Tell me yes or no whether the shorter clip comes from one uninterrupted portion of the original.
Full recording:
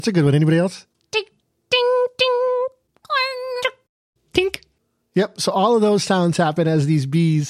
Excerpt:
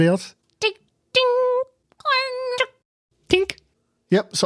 no